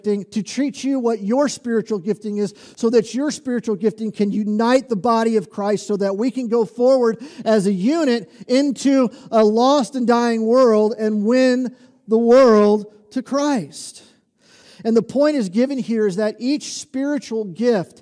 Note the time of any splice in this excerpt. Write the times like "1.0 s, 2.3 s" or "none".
14.6 s